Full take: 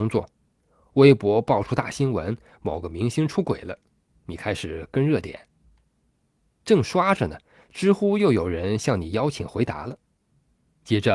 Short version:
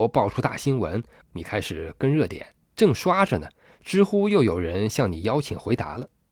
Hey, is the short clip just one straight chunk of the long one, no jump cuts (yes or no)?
no